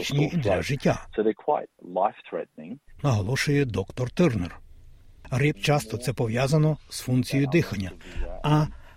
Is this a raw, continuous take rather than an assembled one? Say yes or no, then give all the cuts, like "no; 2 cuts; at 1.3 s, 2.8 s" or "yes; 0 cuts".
no; 1 cut; at 5.5 s